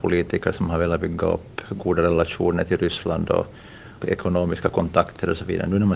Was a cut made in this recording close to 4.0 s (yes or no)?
yes